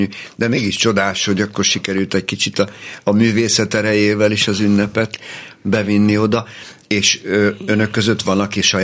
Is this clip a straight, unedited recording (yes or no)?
yes